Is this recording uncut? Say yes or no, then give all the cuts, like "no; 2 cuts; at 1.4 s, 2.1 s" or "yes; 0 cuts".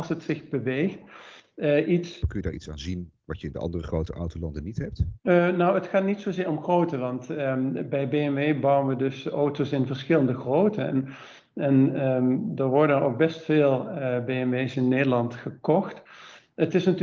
no; 2 cuts; at 2.2 s, 5.2 s